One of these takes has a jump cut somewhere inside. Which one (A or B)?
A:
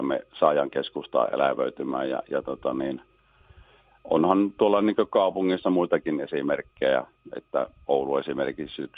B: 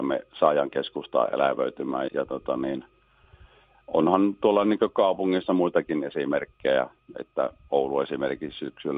B